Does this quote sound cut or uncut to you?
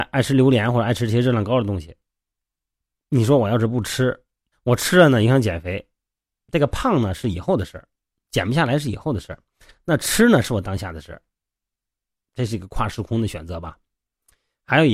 cut